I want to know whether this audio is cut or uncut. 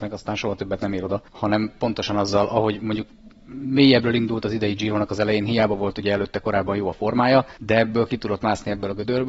cut